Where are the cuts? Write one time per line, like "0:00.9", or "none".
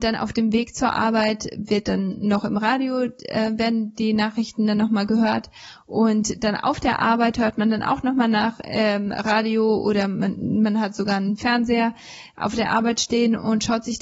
none